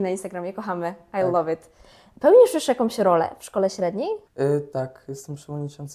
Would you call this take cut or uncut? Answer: cut